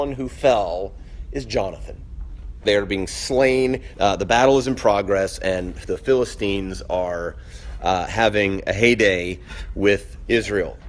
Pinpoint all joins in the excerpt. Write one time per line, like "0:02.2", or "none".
0:02.7
0:03.9